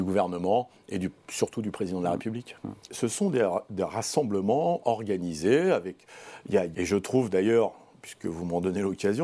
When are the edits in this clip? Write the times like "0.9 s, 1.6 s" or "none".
2.9 s, 6.7 s

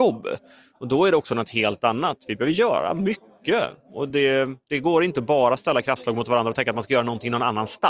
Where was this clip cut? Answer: none

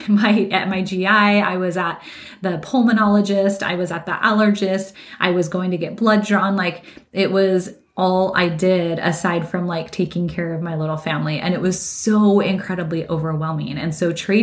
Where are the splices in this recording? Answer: none

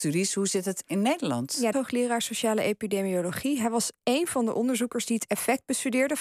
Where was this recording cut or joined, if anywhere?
1.7 s

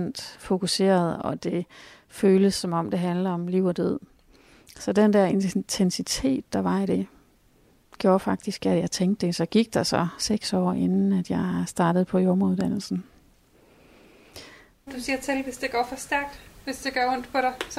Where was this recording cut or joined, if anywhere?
14.9 s

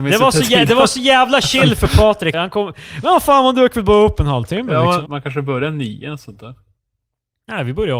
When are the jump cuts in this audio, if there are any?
2.3 s, 5.1 s

